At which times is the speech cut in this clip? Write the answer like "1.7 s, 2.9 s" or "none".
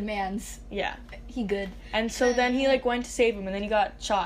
none